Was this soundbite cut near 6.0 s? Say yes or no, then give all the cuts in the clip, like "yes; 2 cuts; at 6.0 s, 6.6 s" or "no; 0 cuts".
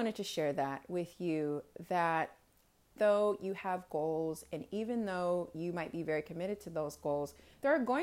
no; 1 cut; at 3.0 s